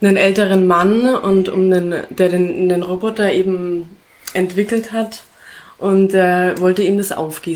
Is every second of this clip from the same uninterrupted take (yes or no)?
yes